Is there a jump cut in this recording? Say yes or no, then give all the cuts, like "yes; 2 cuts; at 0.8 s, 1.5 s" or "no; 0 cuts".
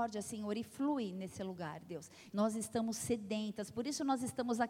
yes; 1 cut; at 2.3 s